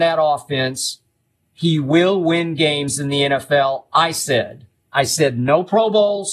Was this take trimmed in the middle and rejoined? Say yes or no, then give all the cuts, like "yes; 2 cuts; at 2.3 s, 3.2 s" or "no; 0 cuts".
no; 0 cuts